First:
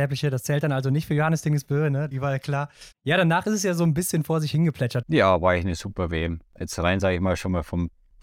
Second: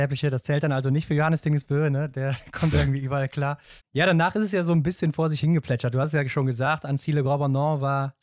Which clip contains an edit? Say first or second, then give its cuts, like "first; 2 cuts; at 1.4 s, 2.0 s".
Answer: first; 2 cuts; at 2.1 s, 5.0 s